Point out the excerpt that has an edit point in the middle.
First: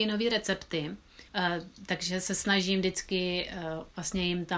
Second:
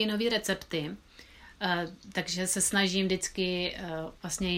first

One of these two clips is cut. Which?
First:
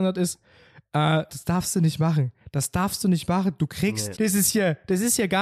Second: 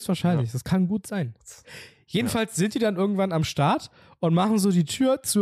first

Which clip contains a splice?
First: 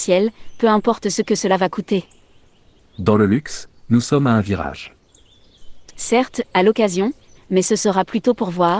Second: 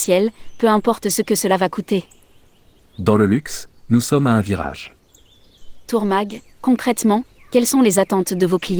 first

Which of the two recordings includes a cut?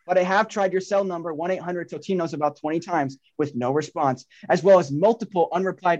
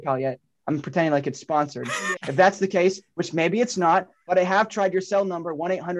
second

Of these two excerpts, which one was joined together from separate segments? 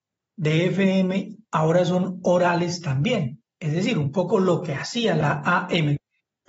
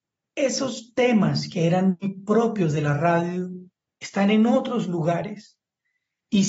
second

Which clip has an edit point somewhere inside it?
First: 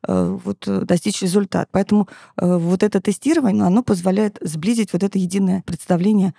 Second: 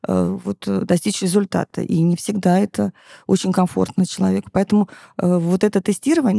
first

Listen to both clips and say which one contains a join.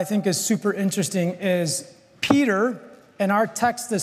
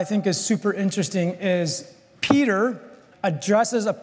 second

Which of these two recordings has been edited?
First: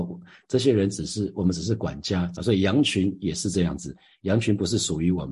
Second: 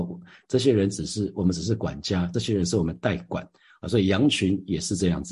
first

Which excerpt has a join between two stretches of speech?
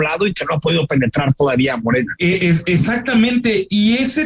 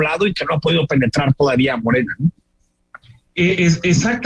first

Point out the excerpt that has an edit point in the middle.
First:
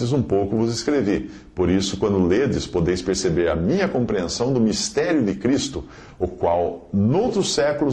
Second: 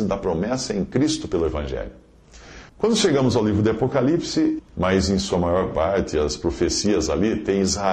second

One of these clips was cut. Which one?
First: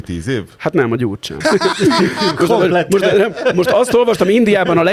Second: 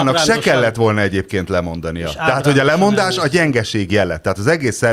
first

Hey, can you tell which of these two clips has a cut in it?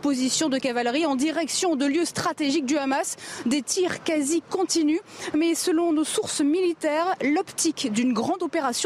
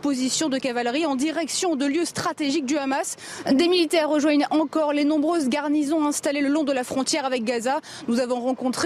second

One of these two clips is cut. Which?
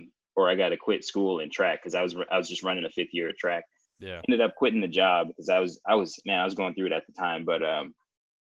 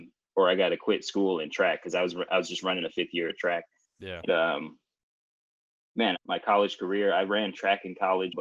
second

